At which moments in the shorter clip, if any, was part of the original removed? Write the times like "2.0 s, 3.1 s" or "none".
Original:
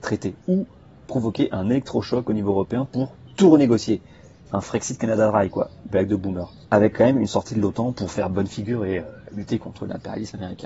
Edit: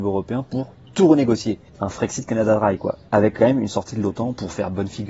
1.7 s, 3.1 s